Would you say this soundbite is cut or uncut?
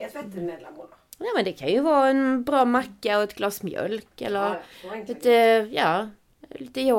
uncut